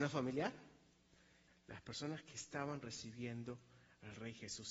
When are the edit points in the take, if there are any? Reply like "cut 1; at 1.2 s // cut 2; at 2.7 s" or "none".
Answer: cut 1; at 1.5 s